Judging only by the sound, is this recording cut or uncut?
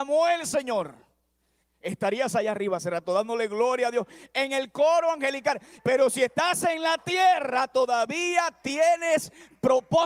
cut